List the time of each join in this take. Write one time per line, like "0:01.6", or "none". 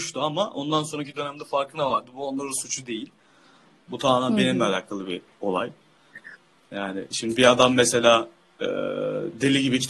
none